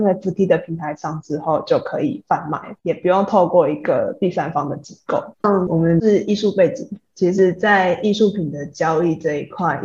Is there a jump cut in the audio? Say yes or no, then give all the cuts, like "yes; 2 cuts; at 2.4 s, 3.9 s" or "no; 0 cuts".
yes; 1 cut; at 5.3 s